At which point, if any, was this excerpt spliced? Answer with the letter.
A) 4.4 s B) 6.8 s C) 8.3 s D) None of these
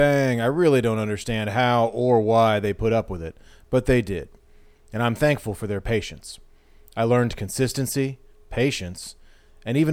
C